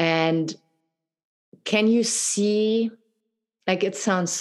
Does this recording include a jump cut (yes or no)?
no